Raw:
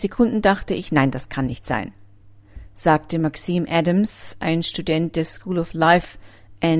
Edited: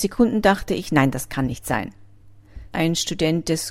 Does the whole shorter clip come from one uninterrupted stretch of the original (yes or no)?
no